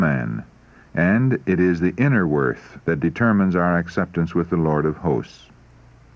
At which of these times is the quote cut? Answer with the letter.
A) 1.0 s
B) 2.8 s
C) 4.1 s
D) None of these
B